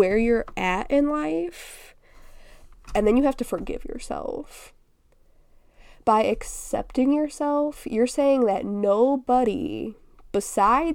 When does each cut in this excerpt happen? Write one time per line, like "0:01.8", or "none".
0:02.7